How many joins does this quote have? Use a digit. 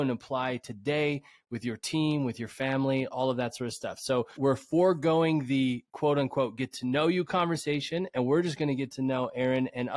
1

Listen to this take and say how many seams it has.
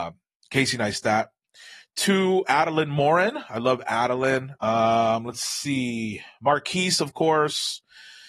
2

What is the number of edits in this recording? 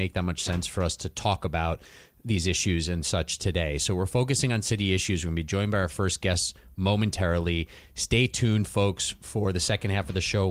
0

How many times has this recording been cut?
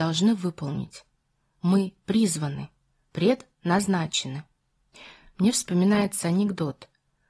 0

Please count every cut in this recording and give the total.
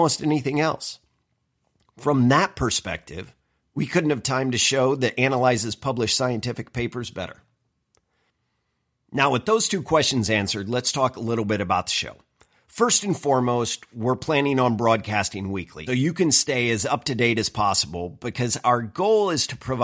1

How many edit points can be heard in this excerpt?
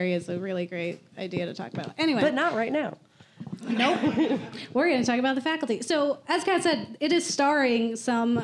0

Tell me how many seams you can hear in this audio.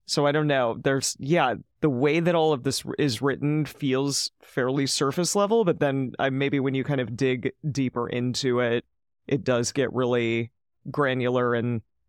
0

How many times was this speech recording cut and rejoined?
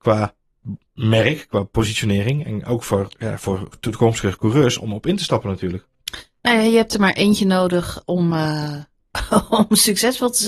0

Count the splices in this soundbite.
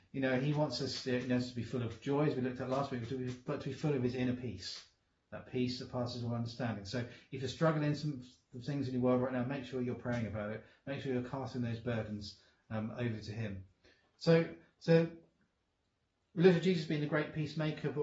0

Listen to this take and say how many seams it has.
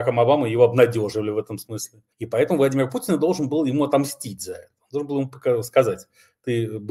1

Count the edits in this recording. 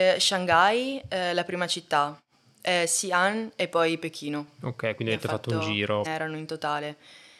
1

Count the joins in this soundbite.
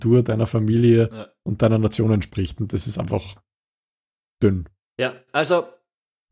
0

